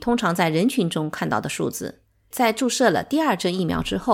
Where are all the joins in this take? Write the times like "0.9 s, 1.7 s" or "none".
2.3 s